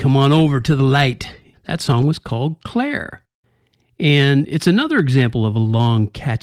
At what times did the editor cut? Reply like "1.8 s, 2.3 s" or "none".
1.5 s